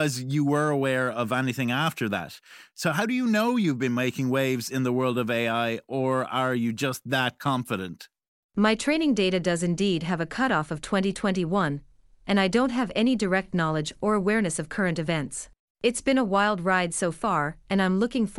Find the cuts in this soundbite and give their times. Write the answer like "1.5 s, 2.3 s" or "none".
8.4 s, 15.7 s